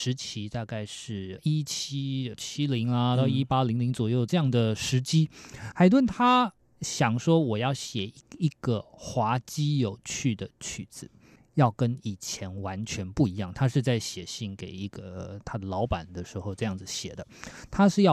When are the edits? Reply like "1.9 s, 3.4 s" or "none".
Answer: none